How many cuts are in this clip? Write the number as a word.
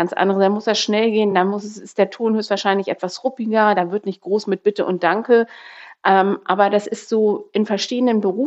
zero